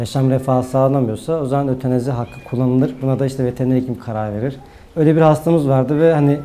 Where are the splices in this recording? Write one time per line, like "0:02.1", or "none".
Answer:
0:04.9